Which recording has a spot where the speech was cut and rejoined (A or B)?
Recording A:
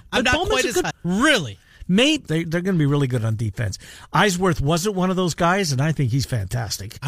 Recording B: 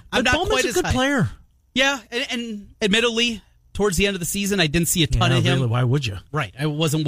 A